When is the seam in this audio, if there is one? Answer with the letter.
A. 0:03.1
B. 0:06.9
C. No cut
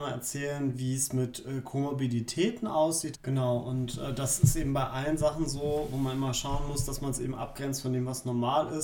A